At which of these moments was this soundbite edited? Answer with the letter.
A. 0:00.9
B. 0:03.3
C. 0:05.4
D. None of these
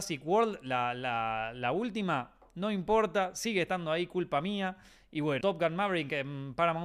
C